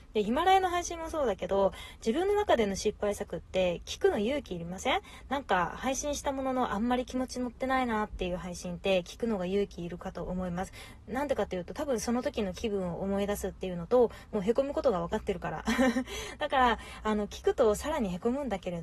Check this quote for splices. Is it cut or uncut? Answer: uncut